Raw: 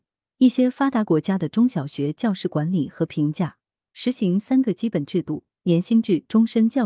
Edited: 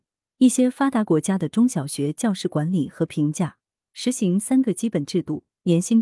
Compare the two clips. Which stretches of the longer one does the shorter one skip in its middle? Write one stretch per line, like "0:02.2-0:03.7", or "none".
none